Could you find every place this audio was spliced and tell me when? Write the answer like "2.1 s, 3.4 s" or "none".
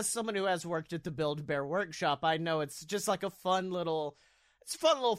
none

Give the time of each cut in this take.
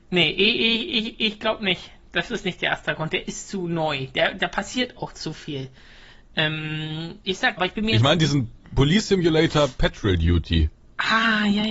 7.6 s

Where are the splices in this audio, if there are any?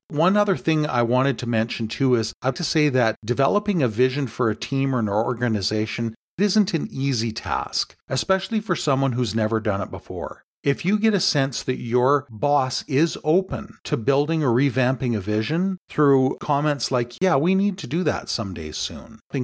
2.5 s

